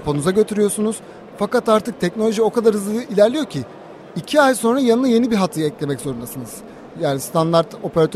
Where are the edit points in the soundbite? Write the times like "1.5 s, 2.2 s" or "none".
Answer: 6.9 s